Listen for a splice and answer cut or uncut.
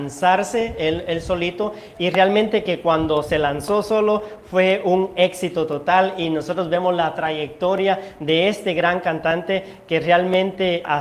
uncut